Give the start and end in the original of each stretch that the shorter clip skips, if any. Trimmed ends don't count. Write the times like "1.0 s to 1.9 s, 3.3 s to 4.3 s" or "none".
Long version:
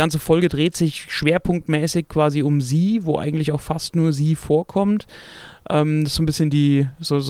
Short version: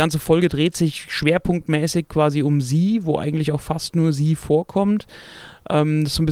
none